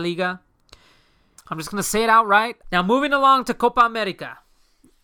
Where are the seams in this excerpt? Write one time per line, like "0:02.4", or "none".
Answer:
0:01.4
0:02.6